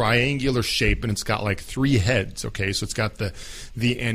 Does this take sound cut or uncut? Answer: uncut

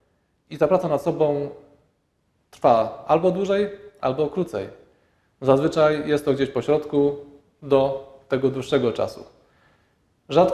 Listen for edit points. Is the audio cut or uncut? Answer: uncut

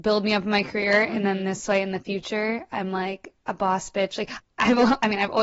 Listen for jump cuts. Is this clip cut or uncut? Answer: cut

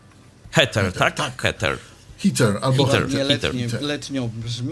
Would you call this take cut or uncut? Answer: uncut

